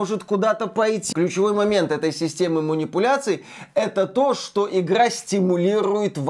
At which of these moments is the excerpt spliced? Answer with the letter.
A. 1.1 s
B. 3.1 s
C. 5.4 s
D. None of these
A